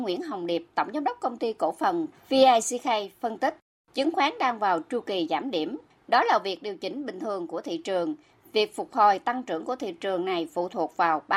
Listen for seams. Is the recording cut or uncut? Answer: uncut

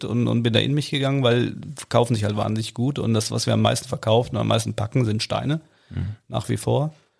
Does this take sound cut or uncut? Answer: uncut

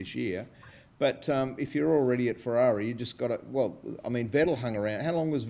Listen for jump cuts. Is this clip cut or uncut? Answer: uncut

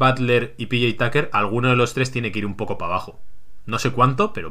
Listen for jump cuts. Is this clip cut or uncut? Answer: uncut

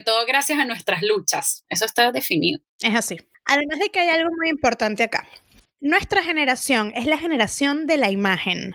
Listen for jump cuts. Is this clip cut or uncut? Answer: cut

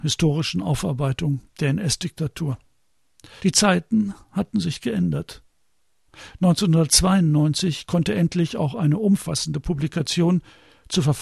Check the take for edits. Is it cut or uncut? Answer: cut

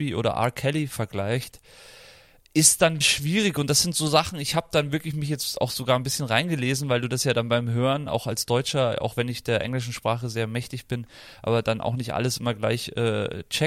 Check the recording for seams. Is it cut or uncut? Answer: cut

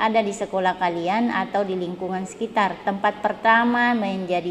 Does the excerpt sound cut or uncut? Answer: uncut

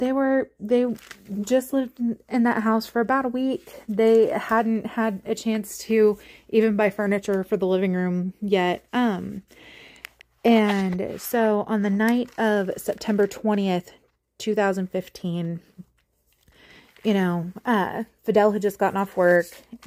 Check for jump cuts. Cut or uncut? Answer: uncut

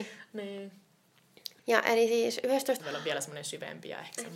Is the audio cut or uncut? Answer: cut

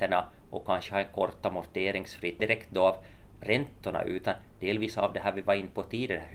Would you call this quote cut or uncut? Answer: cut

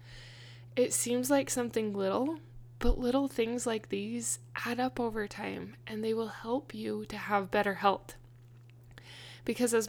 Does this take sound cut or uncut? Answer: uncut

